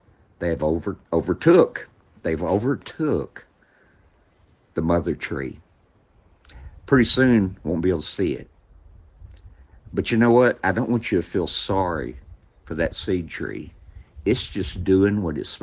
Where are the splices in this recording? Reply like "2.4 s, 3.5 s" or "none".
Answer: 1.0 s